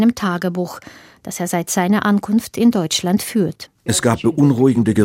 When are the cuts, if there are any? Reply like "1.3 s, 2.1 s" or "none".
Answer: 3.9 s